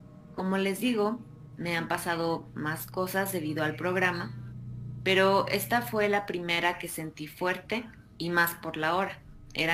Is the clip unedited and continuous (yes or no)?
yes